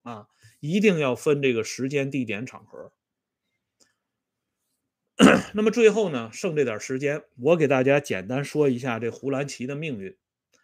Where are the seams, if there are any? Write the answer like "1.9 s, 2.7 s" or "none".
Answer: none